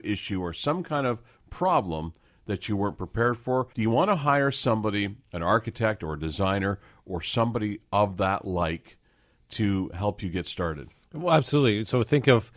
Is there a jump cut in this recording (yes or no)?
yes